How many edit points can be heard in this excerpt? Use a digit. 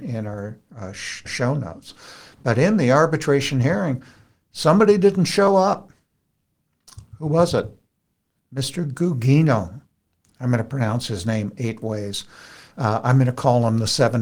1